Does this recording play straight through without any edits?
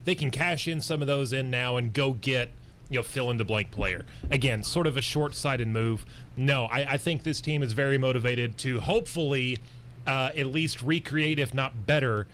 yes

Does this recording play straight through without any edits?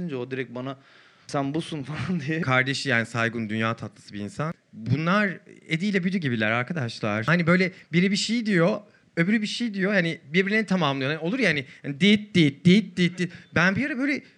yes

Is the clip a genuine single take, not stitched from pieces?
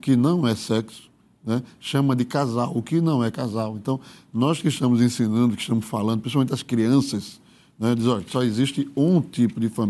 yes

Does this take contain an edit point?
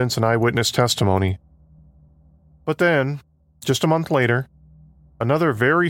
no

